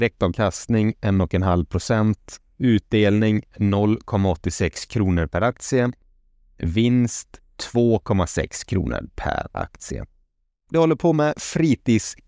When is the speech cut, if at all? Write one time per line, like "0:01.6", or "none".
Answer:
0:10.7